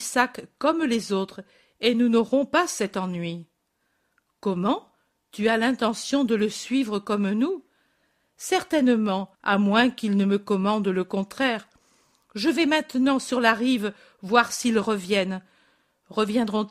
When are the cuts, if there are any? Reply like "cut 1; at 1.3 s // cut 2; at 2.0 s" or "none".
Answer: cut 1; at 9.3 s